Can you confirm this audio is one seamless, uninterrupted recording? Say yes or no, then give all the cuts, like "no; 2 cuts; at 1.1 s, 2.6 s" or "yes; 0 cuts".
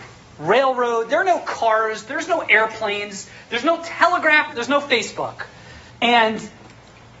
no; 2 cuts; at 4.5 s, 5.9 s